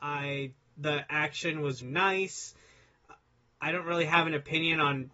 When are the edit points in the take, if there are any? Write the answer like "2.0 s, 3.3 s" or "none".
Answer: 1.8 s